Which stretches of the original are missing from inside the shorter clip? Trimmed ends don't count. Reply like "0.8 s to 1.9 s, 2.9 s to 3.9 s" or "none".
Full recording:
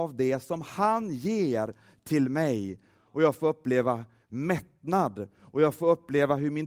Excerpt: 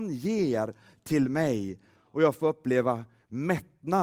none